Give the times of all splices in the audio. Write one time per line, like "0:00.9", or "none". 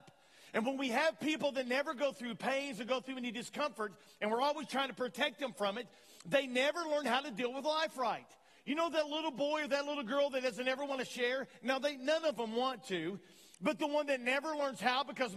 none